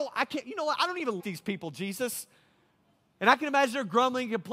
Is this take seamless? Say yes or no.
no